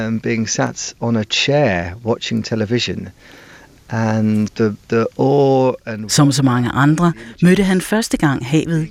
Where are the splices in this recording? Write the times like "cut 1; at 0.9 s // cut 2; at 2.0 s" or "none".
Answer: cut 1; at 4.5 s